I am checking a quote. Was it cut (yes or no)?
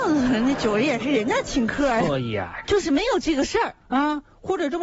yes